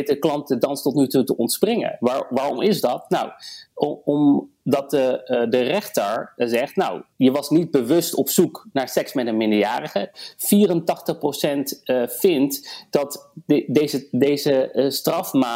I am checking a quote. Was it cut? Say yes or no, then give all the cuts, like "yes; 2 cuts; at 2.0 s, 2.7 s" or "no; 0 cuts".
yes; 2 cuts; at 7.1 s, 10.1 s